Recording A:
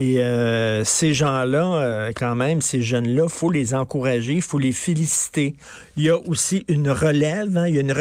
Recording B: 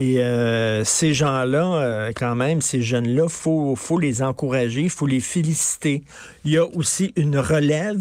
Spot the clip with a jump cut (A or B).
A